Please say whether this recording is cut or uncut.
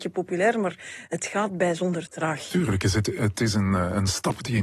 uncut